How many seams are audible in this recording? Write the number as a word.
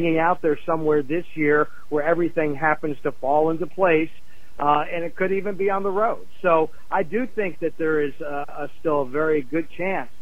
zero